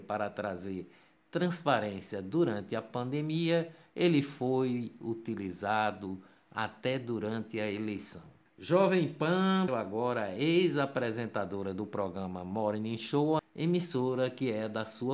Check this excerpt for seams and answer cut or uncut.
cut